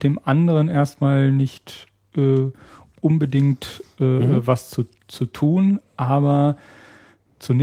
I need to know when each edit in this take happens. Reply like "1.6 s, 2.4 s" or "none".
none